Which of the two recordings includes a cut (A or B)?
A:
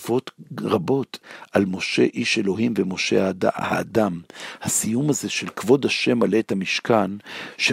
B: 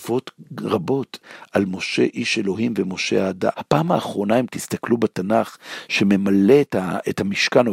B